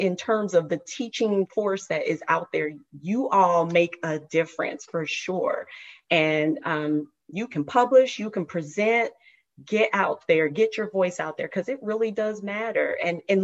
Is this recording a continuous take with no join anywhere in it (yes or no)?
yes